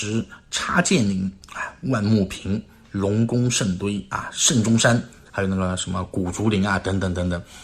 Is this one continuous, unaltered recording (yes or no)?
no